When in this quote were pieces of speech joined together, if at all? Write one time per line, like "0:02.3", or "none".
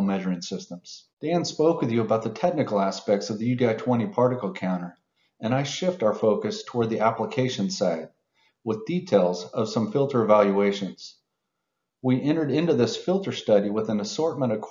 0:01.1